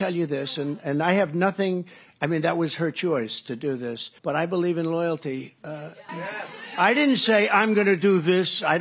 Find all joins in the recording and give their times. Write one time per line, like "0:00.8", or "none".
0:04.2
0:06.1